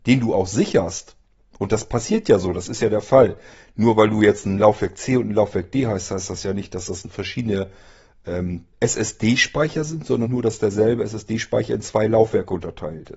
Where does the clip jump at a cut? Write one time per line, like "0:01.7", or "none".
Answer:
0:08.7
0:10.3